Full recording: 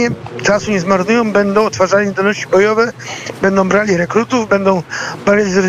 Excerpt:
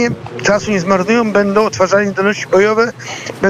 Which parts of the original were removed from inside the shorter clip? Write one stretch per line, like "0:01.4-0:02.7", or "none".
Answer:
none

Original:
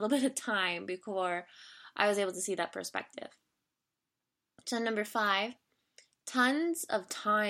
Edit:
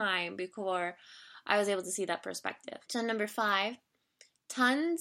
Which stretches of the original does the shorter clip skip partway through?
0:03.3-0:04.6

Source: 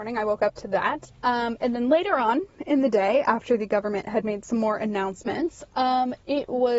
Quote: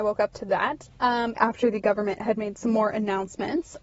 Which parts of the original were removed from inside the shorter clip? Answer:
0:01.6-0:03.2

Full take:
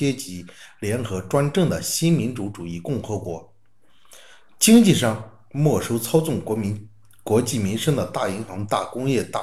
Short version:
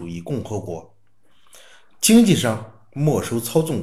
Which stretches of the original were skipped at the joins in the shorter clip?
none

